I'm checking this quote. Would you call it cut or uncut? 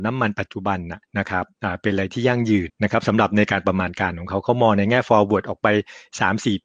cut